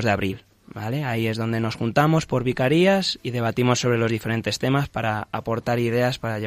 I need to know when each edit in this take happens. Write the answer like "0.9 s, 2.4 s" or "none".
none